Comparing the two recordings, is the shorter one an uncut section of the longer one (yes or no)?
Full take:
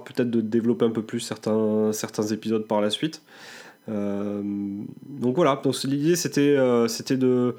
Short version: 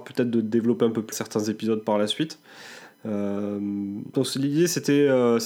no